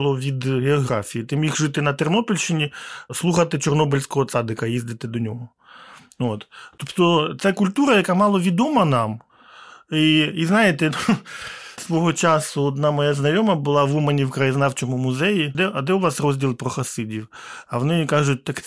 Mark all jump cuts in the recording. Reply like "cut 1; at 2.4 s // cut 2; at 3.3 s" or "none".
cut 1; at 11.8 s // cut 2; at 15.5 s